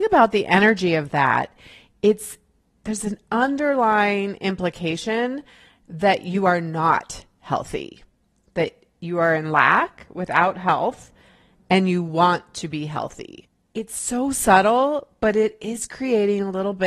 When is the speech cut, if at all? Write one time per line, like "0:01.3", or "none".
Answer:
none

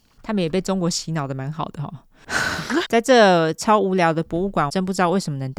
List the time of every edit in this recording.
0:02.8
0:04.7

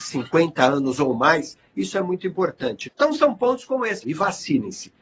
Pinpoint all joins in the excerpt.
0:02.8
0:04.0

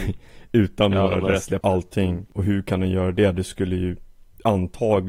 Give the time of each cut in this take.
0:01.6

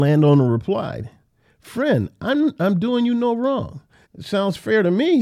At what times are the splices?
0:04.0

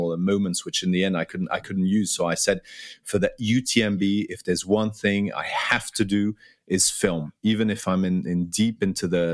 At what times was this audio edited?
none

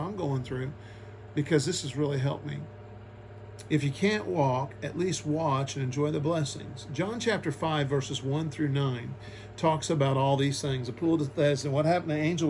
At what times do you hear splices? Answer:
0:03.7

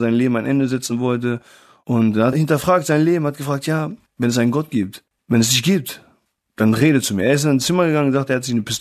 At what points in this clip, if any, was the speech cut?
0:02.3

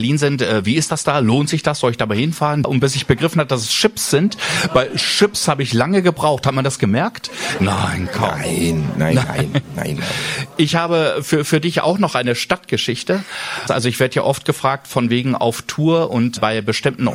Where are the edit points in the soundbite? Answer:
0:02.6
0:07.6

